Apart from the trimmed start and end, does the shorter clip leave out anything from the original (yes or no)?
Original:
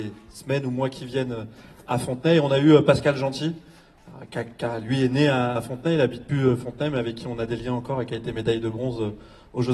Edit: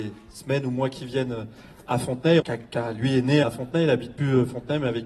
yes